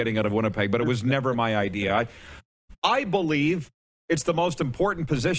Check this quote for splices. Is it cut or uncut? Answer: uncut